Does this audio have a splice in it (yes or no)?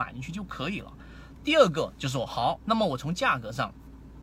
yes